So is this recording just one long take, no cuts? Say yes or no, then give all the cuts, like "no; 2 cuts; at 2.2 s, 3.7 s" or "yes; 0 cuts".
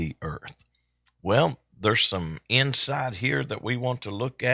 yes; 0 cuts